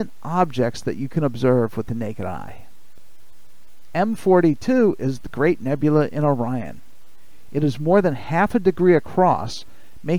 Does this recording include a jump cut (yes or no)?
yes